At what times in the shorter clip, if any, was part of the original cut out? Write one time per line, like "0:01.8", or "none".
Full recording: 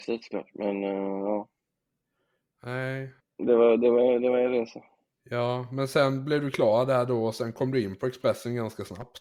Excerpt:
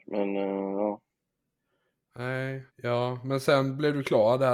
0:02.7